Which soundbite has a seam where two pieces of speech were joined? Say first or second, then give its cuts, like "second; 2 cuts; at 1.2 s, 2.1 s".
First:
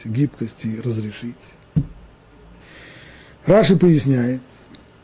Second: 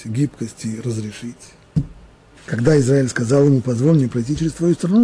second; 1 cut; at 2.4 s